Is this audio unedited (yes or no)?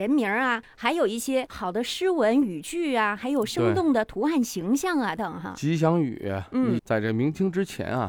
no